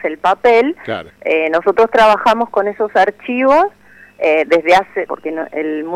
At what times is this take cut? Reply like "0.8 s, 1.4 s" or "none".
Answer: 1.1 s, 5.1 s